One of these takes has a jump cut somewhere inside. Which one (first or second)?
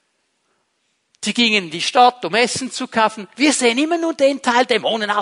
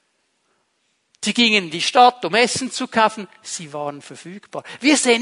first